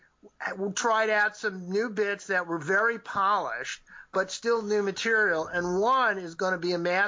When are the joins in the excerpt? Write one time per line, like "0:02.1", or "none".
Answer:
none